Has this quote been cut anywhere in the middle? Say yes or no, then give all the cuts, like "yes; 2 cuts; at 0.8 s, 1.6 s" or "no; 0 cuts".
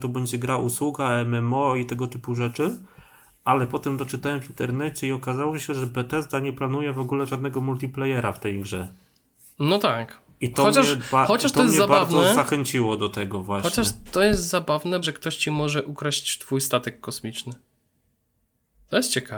yes; 1 cut; at 15.0 s